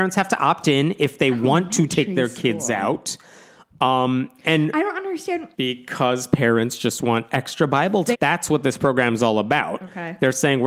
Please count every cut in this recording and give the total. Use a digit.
2